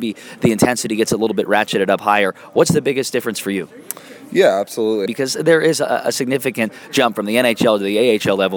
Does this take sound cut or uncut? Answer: cut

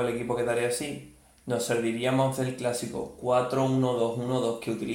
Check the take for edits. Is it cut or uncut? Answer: uncut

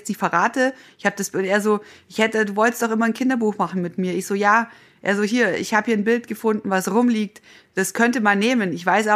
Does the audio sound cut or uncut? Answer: uncut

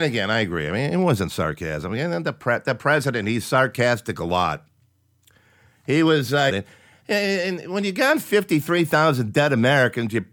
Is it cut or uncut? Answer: cut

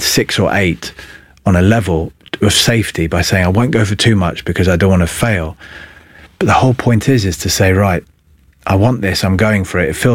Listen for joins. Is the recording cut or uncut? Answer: uncut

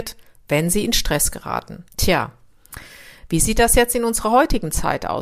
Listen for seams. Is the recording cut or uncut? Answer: cut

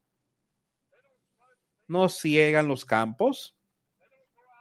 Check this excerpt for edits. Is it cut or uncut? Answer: uncut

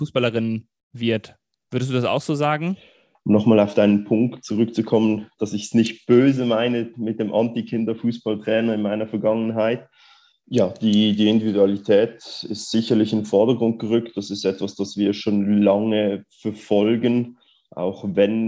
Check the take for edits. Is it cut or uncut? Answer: cut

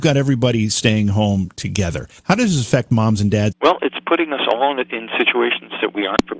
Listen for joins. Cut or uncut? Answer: cut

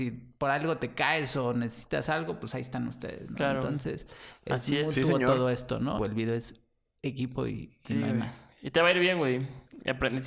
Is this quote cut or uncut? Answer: cut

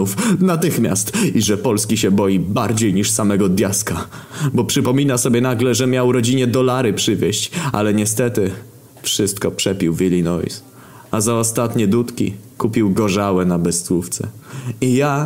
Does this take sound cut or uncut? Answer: uncut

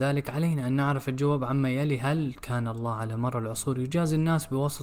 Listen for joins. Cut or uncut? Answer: uncut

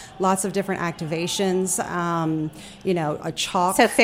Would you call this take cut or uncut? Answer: uncut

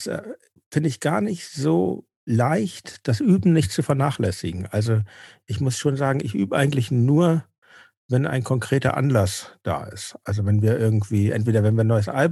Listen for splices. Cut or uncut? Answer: uncut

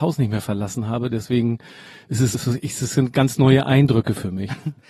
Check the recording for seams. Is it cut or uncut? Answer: cut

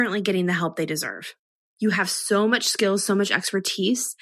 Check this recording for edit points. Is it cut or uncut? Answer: cut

